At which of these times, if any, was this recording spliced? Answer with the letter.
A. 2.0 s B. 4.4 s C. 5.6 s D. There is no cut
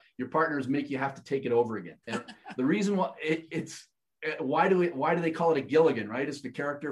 A